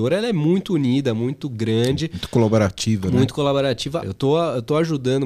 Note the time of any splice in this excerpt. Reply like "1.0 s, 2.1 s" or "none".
4.0 s